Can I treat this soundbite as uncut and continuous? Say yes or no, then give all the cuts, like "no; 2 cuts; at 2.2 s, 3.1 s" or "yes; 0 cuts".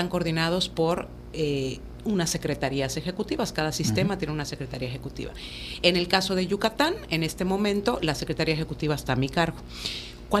yes; 0 cuts